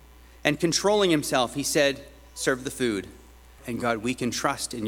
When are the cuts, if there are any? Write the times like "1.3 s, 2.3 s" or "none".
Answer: 3.6 s